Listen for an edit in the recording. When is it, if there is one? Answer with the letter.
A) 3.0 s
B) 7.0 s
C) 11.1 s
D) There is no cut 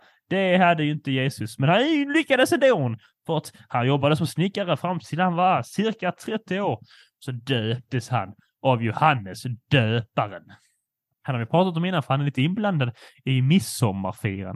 C